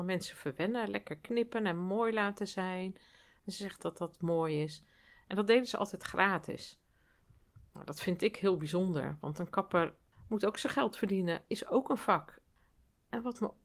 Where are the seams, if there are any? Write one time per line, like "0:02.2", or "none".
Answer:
0:03.8